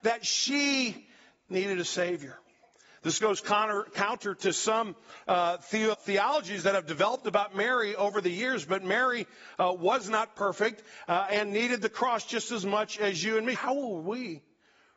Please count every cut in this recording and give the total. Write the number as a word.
two